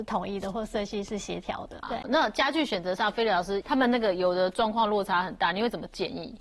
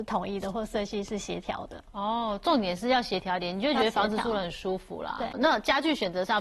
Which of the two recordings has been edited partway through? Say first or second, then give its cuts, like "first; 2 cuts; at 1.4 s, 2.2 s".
first; 2 cuts; at 1.8 s, 3.6 s